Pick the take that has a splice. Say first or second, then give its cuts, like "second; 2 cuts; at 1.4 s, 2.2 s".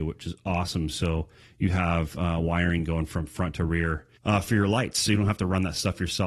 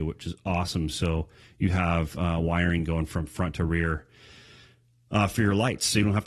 first; 1 cut; at 4.2 s